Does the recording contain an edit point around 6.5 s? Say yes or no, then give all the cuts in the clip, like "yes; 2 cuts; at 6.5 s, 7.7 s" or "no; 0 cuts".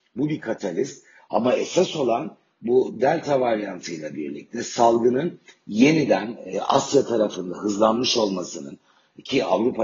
yes; 1 cut; at 6.5 s